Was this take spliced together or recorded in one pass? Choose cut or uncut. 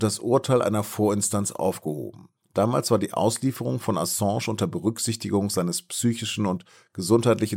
uncut